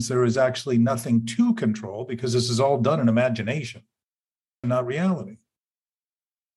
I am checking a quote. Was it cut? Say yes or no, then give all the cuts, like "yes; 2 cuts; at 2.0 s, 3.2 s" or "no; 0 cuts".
yes; 1 cut; at 4.6 s